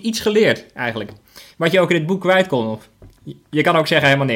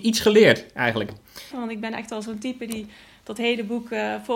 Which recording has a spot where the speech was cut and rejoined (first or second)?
second